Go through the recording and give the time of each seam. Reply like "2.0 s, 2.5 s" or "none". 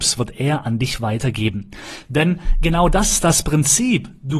2.0 s